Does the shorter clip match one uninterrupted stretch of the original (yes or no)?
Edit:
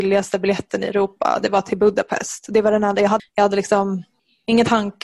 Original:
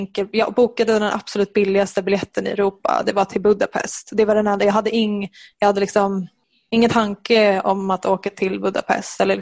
no